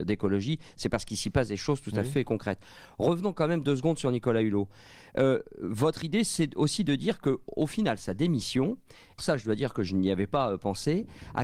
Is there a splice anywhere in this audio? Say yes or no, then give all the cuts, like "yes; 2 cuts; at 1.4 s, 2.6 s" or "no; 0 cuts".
yes; 1 cut; at 9.2 s